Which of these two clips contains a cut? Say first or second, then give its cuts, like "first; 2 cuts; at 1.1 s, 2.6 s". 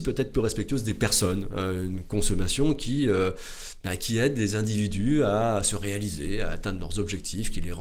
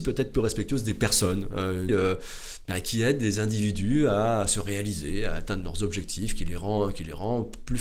second; 1 cut; at 1.9 s